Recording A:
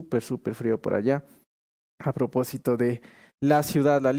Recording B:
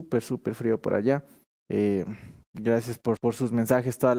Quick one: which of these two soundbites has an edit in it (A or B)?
B